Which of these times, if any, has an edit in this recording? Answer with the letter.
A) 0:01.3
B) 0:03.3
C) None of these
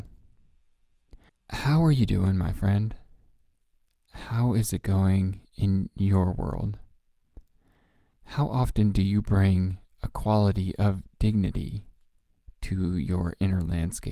A